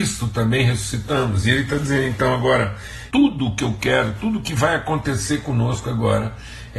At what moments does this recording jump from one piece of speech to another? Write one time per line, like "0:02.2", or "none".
0:03.1